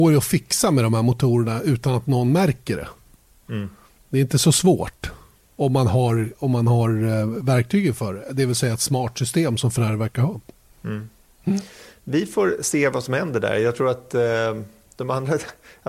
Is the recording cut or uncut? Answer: uncut